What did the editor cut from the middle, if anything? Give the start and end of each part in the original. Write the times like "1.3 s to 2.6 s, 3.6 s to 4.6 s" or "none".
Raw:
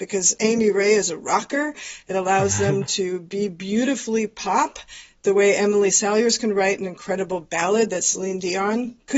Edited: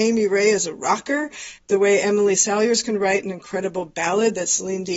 2.0 s to 5.1 s